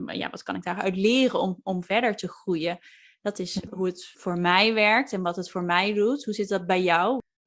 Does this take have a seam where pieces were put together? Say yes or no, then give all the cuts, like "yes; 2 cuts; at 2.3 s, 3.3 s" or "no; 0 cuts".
no; 0 cuts